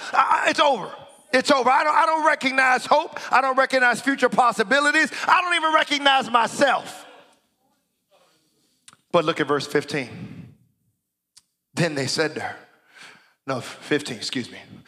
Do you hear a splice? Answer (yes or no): no